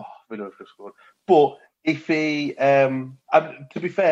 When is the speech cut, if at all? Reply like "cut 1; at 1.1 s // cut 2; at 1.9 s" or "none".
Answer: cut 1; at 3.2 s